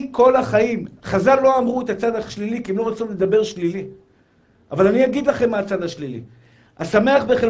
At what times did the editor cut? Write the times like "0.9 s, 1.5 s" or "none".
none